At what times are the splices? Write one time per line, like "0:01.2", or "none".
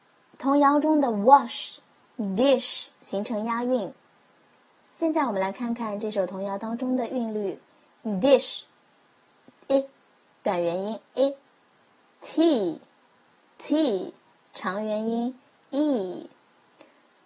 0:02.9